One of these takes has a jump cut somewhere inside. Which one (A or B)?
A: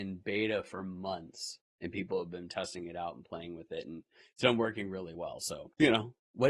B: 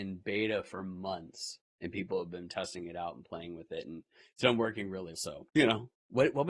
B